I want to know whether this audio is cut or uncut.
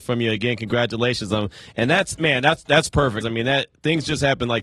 cut